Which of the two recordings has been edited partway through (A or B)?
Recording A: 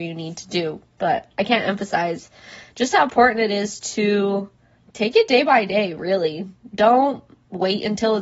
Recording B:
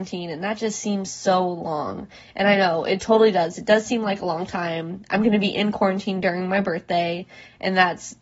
A